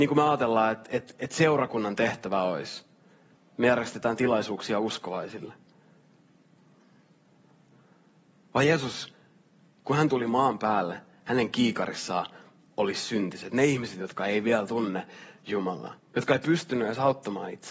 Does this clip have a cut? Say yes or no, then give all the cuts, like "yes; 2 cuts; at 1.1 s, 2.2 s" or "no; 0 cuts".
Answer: yes; 1 cut; at 16.0 s